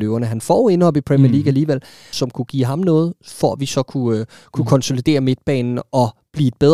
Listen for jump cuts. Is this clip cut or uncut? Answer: cut